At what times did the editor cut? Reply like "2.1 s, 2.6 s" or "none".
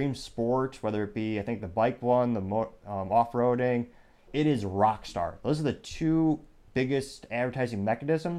4.3 s

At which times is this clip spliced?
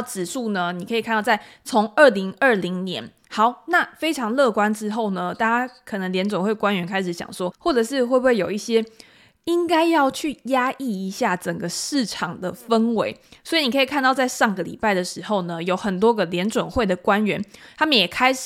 3.2 s, 7.5 s

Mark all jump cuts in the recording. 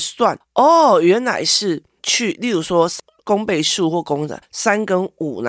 none

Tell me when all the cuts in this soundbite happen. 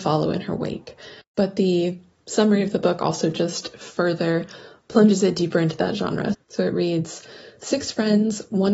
1.2 s, 6.3 s

